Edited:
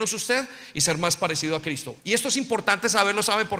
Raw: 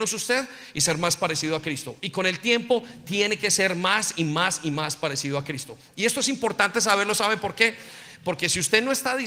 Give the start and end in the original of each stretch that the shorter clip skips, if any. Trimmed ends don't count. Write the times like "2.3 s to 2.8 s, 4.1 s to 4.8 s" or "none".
2.0 s to 5.9 s